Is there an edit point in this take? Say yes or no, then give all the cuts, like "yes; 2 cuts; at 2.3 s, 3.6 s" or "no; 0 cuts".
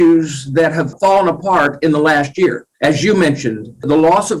yes; 1 cut; at 2.7 s